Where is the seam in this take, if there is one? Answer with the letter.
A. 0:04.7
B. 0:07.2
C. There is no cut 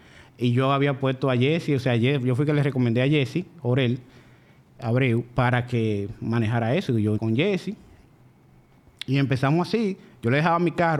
B